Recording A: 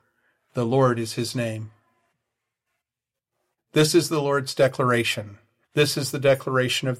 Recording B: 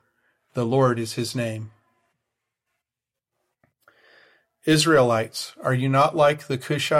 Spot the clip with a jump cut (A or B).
A